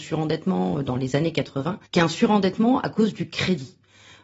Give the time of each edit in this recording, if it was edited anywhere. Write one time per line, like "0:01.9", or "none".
0:01.9